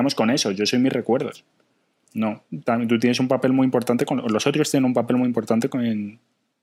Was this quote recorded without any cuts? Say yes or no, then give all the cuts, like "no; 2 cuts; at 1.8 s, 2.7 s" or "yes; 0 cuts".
yes; 0 cuts